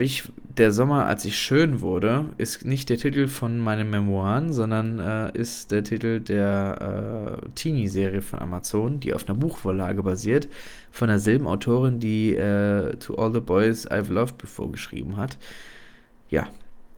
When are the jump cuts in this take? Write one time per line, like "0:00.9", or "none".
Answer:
none